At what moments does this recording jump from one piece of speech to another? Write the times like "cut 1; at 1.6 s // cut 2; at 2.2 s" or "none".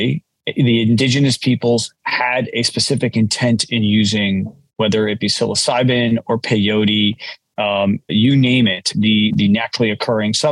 cut 1; at 8.1 s // cut 2; at 9.3 s

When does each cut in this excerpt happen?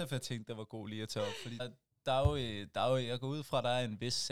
cut 1; at 1.6 s

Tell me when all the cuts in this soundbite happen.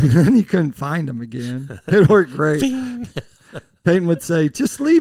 none

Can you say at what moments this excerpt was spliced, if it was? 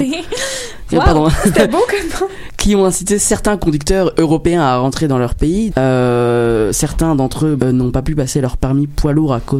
cut 1; at 5.7 s // cut 2; at 7.6 s

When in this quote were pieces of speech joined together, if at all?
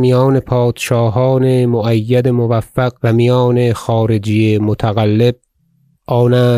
cut 1; at 3.0 s

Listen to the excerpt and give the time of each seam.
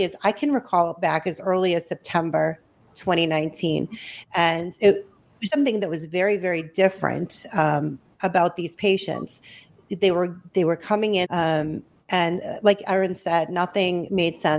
cut 1; at 5.5 s // cut 2; at 11.2 s

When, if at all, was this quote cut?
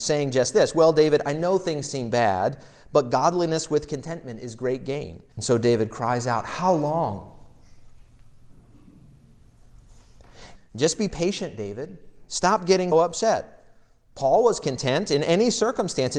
cut 1; at 5.3 s // cut 2; at 10.6 s // cut 3; at 12.9 s

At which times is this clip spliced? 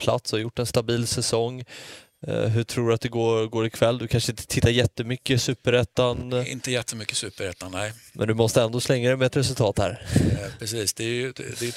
none

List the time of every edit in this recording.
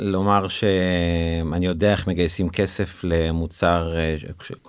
none

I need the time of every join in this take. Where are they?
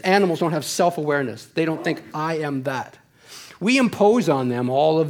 cut 1; at 2.1 s

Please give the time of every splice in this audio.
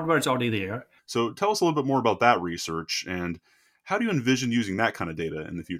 cut 1; at 1.0 s

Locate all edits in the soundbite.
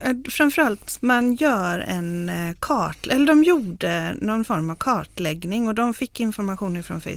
cut 1; at 1.0 s

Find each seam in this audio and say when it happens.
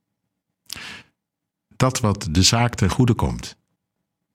none

